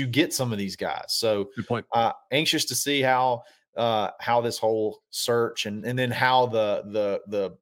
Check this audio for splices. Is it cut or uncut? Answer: uncut